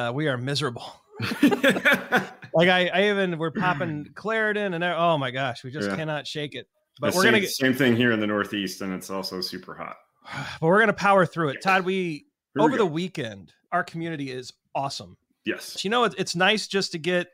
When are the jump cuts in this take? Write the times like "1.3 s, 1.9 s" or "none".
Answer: 13.7 s, 15.8 s